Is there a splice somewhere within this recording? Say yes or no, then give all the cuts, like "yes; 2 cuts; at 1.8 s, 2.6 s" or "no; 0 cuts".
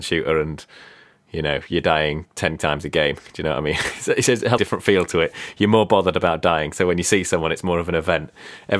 yes; 1 cut; at 4.6 s